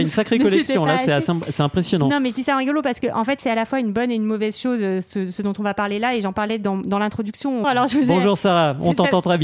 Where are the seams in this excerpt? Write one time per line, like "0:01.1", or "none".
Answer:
0:07.6